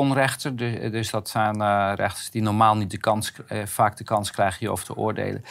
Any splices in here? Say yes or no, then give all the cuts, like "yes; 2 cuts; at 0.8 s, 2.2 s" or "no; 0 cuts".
no; 0 cuts